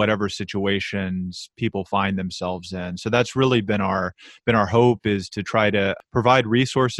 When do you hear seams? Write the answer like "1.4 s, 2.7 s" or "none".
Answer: none